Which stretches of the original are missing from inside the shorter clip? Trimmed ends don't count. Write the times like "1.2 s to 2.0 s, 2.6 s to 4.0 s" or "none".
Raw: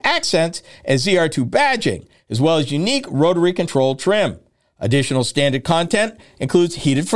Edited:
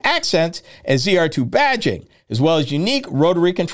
none

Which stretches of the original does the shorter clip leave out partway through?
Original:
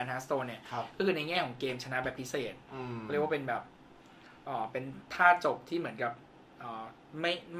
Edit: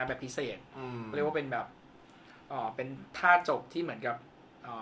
none

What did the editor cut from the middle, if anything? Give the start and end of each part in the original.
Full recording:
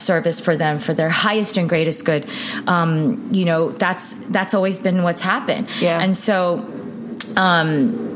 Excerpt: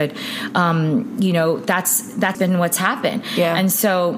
4.5 s to 4.8 s

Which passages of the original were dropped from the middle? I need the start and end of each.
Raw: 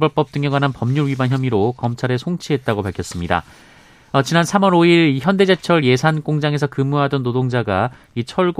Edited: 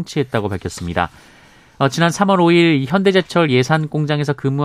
none

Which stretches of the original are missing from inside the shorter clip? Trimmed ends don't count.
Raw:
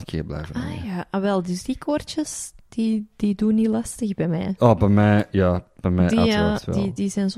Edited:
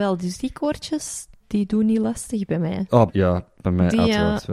2.7 s to 3.1 s, 4.8 s to 5.3 s

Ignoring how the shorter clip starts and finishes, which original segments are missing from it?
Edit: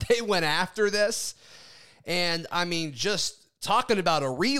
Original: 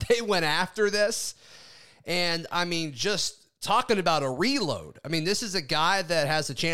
none

